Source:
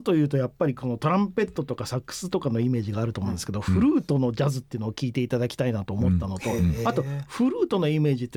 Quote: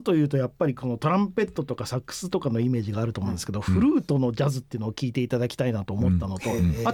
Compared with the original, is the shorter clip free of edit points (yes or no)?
yes